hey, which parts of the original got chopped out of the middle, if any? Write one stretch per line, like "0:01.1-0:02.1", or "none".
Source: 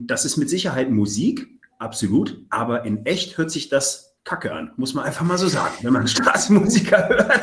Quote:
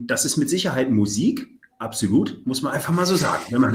0:02.4-0:04.8

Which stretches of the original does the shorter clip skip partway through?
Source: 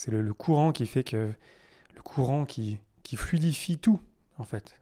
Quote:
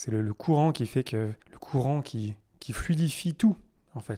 0:01.4-0:01.8

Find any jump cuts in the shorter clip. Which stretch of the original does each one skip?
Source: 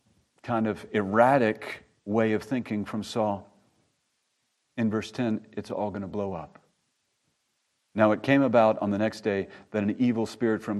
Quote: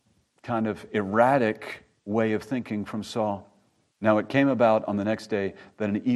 0:03.9-0:07.8

